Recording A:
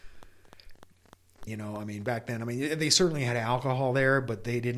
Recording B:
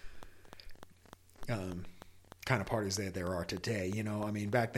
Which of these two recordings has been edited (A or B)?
A